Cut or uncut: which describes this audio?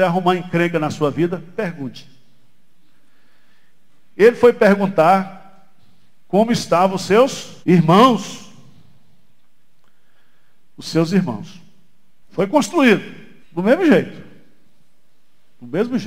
cut